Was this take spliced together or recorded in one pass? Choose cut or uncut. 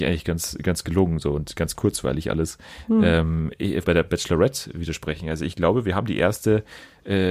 cut